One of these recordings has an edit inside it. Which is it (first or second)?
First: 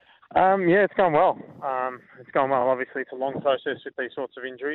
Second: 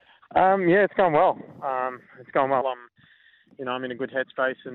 second